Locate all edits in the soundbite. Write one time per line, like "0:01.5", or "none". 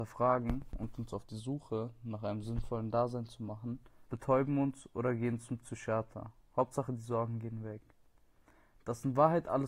0:04.1